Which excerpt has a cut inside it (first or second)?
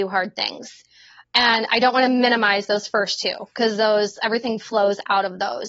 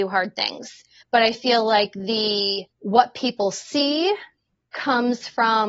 second